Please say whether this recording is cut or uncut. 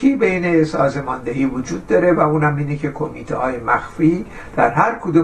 uncut